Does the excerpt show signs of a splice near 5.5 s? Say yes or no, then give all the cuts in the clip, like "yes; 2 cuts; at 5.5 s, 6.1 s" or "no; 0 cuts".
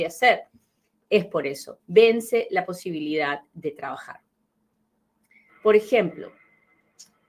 yes; 2 cuts; at 1.8 s, 5.5 s